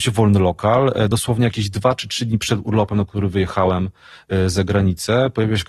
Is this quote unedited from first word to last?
yes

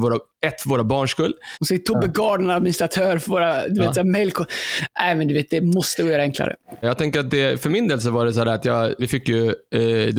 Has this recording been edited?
yes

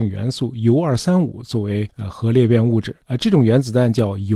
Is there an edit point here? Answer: yes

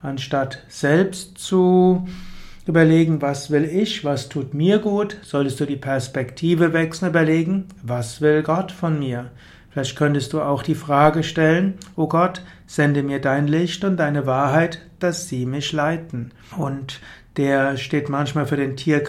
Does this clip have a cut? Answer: yes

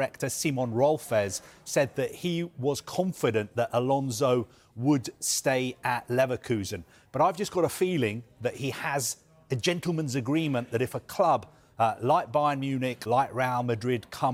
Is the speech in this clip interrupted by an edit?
yes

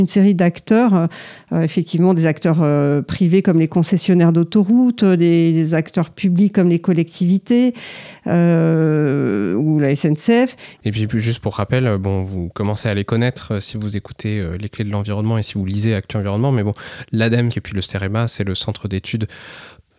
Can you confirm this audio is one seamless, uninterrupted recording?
no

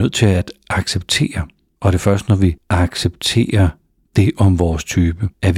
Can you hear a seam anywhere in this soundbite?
no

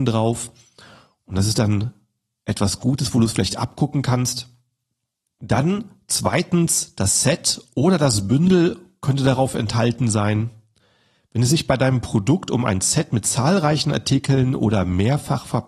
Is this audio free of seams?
yes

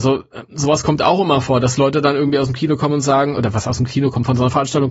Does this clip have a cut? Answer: no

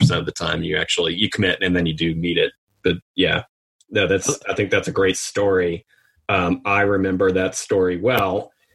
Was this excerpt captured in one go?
yes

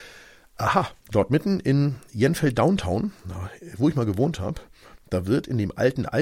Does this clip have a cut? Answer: yes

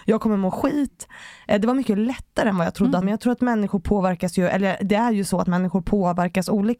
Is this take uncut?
no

